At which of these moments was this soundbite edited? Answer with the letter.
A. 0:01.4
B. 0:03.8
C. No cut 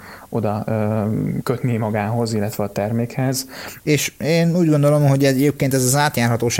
B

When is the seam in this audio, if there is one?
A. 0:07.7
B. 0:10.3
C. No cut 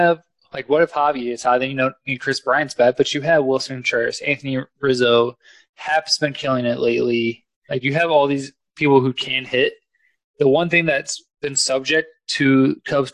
A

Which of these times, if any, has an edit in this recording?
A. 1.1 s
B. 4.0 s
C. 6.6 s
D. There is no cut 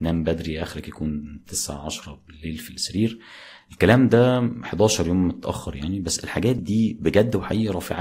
C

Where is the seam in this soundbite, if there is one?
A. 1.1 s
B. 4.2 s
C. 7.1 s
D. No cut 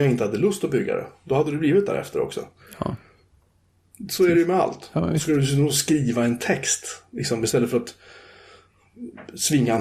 D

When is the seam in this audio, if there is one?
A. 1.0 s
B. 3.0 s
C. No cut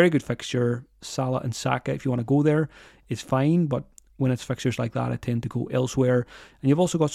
A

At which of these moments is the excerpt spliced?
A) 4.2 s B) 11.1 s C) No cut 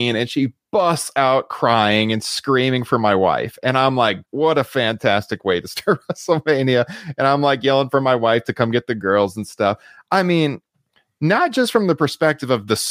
A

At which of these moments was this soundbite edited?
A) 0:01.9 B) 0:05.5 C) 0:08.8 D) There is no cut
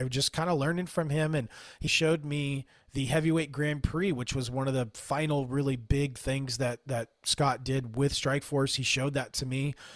A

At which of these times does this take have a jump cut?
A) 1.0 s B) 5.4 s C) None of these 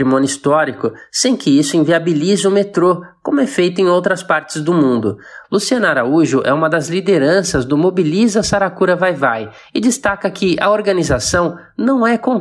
B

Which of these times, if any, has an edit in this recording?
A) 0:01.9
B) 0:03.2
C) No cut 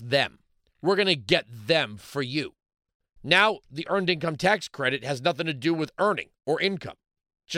B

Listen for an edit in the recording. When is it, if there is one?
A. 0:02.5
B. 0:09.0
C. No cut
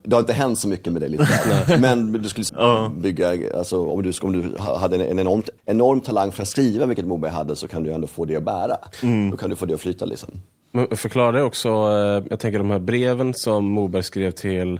A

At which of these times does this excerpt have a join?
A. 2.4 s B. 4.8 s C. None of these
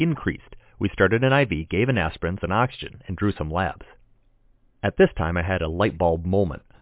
A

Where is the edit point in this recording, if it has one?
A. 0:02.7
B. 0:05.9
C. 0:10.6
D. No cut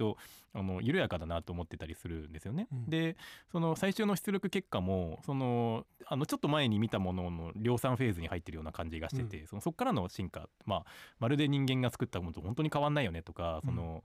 B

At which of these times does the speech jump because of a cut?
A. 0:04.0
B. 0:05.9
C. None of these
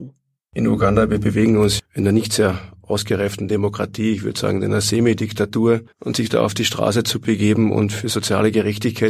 B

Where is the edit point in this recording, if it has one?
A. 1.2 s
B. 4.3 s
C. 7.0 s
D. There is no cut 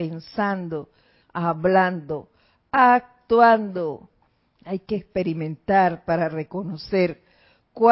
A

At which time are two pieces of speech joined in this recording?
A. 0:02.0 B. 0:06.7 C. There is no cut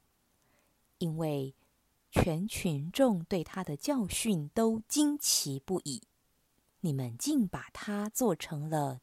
B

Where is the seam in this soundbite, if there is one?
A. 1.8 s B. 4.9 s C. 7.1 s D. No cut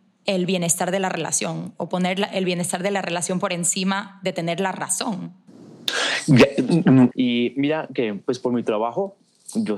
C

